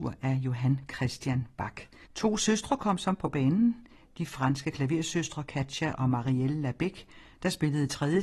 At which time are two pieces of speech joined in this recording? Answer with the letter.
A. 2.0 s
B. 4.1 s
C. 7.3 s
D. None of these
A